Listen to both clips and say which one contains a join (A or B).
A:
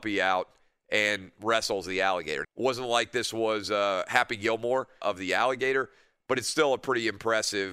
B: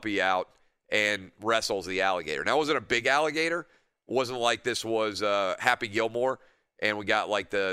A